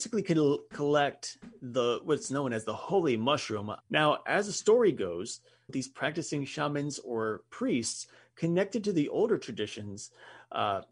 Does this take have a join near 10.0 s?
no; 2 cuts; at 3.8 s, 5.7 s

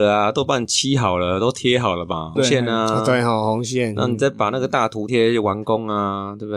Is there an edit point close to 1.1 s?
no; 2 cuts; at 2.4 s, 5.1 s

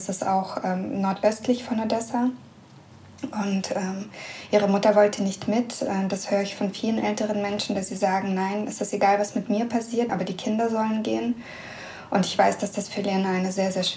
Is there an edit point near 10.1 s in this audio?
yes; 1 cut; at 10.1 s

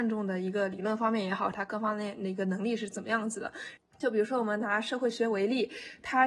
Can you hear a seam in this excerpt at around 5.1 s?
no; 2 cuts; at 1.5 s, 3.8 s

